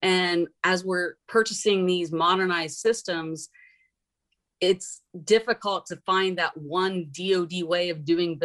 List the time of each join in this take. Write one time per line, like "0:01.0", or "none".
0:01.2